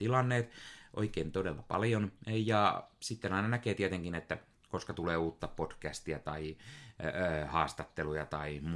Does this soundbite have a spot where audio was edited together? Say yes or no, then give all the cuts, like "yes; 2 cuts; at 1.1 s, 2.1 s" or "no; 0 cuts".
no; 0 cuts